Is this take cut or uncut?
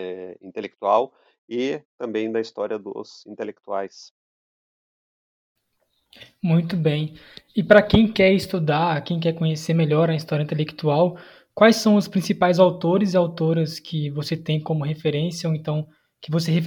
uncut